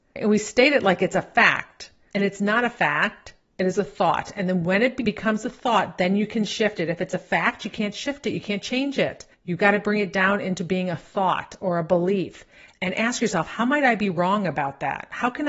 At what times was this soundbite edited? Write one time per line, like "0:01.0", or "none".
0:09.3